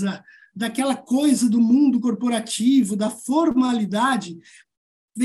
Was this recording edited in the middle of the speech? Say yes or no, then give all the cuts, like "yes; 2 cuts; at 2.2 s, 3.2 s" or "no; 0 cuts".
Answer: no; 0 cuts